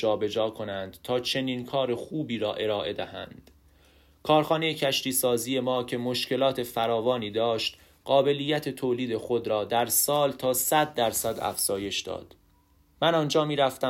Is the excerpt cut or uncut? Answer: uncut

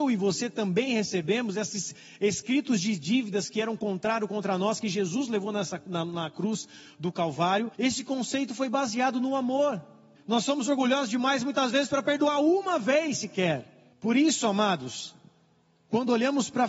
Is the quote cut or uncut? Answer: cut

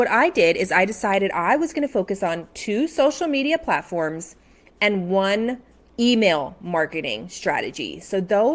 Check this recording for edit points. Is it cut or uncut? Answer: uncut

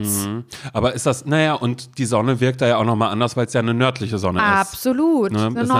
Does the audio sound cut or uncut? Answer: uncut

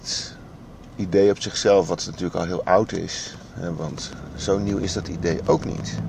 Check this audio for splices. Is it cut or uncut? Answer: uncut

